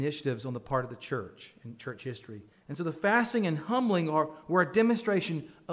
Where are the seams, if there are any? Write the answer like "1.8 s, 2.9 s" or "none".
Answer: 2.5 s